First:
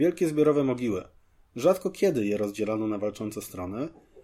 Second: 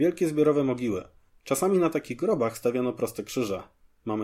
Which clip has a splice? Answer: second; 1 cut; at 1.3 s

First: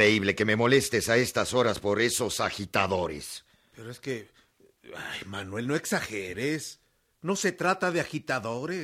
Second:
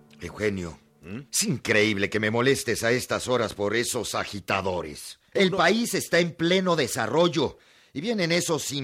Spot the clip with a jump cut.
second; 2 cuts; at 1.3 s, 5.3 s

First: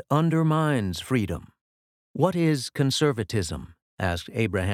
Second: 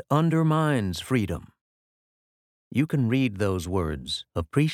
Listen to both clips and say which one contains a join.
first; 1 cut; at 2.0 s

